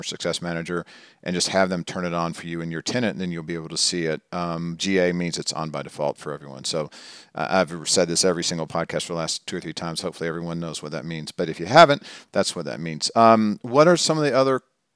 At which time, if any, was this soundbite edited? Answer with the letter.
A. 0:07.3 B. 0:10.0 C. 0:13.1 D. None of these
D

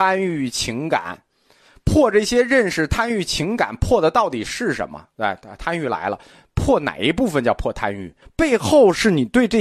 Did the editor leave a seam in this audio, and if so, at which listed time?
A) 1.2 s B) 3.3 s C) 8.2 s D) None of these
C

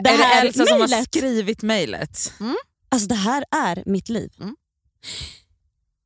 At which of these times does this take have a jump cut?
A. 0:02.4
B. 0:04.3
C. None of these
C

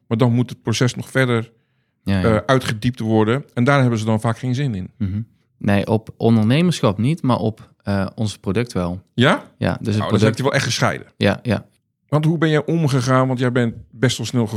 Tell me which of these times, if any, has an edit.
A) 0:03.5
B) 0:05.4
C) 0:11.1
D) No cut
B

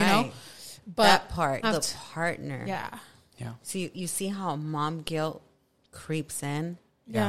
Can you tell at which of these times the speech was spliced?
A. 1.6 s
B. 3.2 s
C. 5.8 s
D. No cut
A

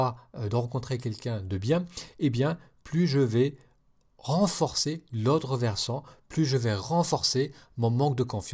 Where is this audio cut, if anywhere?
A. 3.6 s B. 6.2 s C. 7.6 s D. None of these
D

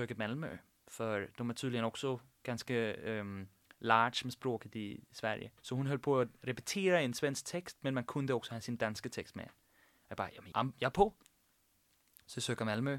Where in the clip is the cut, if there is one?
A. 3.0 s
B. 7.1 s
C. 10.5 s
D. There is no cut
C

